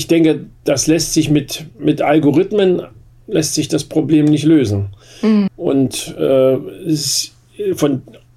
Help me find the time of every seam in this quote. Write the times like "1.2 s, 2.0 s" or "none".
5.5 s